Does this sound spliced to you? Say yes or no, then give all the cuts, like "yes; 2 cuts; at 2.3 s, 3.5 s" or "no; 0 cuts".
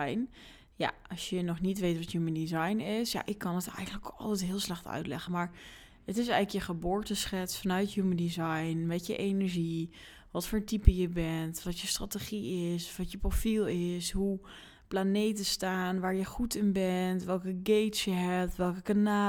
no; 0 cuts